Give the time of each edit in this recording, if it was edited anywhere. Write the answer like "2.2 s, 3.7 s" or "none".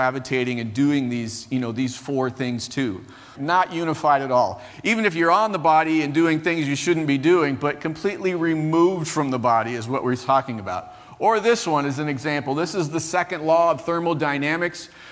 3.3 s